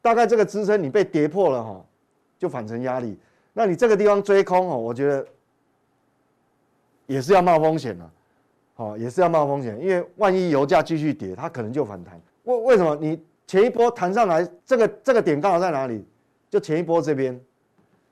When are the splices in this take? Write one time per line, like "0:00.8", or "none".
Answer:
0:12.3
0:14.6